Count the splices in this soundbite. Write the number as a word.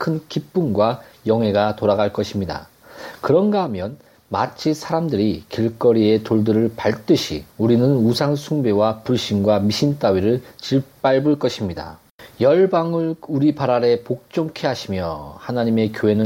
one